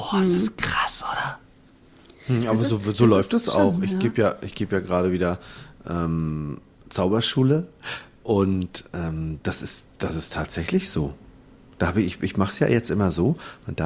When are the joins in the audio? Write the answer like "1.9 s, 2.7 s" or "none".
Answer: none